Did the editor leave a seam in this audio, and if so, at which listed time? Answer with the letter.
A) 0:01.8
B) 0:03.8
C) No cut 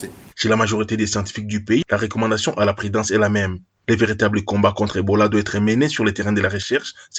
A